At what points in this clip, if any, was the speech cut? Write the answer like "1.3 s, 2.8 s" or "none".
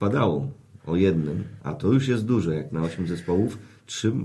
none